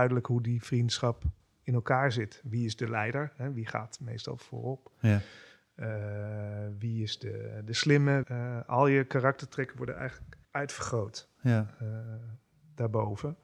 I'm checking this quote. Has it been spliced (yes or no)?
yes